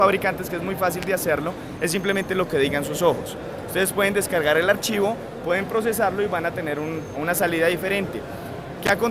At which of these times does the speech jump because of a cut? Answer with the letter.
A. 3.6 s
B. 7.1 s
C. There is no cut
B